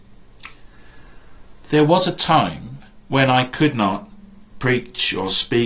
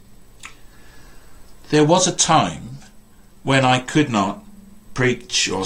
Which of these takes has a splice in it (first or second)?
first